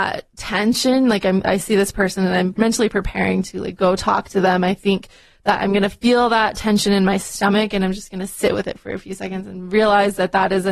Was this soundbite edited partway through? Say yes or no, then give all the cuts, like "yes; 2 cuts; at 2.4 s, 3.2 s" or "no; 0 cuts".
yes; 1 cut; at 1.4 s